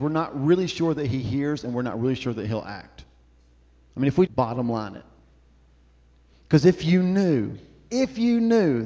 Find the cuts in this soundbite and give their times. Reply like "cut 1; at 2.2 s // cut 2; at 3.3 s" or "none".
cut 1; at 4.3 s